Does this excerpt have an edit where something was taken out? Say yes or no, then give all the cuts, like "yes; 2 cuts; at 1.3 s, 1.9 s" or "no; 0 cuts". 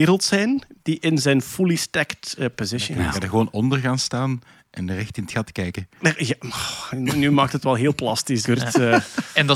yes; 1 cut; at 8.4 s